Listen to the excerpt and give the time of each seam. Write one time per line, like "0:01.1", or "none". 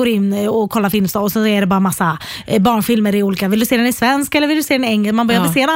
none